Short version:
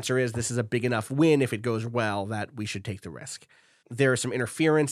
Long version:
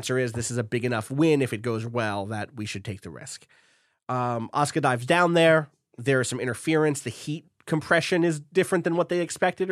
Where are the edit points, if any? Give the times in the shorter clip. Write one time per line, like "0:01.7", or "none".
0:03.8